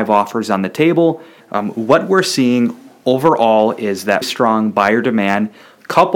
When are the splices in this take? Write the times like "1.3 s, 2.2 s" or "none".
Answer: 1.4 s, 4.2 s